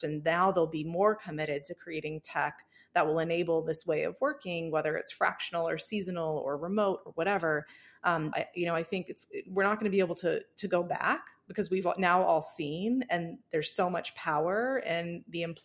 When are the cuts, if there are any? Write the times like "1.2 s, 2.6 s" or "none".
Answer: 8.3 s